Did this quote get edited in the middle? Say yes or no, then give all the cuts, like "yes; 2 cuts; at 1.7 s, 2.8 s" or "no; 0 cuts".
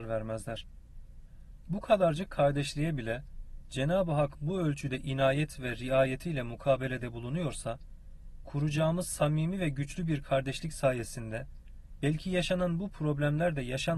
yes; 1 cut; at 1.6 s